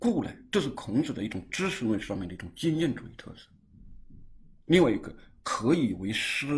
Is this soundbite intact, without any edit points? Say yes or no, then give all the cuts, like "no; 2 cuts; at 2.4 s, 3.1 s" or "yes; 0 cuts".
yes; 0 cuts